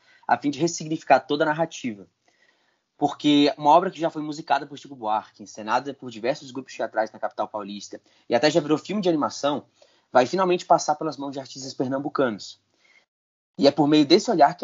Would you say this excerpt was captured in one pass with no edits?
yes; 0 cuts

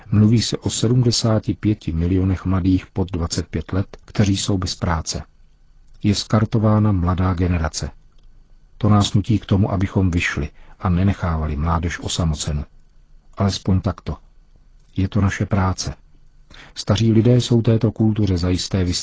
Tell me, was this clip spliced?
yes; 1 cut; at 4.0 s

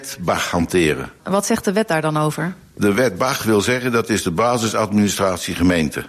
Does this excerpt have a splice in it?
no; 0 cuts

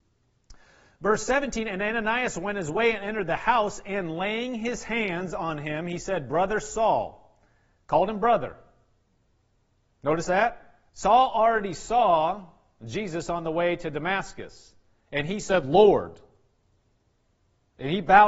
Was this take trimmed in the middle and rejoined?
yes; 1 cut; at 10.9 s

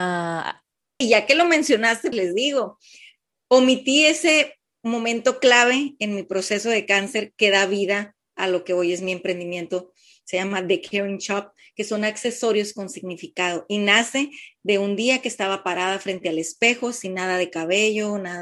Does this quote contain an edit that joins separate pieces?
yes; 2 cuts; at 1.0 s, 2.1 s

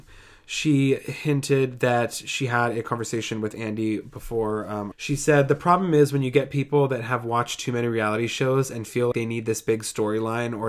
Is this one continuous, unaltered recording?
no; 2 cuts; at 4.9 s, 9.1 s

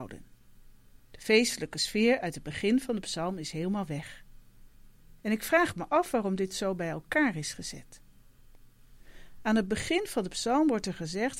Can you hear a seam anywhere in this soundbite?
no; 0 cuts

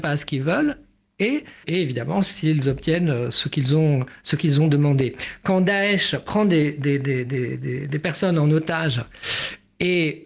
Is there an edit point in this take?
yes; 1 cut; at 1.6 s

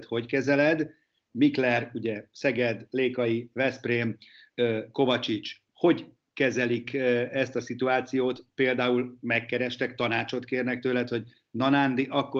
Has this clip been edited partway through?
yes; 2 cuts; at 1.3 s, 5.7 s

